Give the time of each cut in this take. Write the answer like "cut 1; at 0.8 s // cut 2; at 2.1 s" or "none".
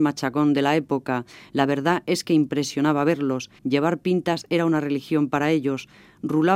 cut 1; at 3.6 s